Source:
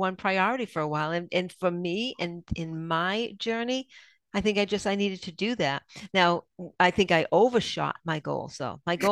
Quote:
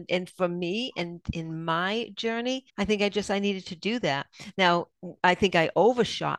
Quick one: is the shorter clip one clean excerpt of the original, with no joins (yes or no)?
no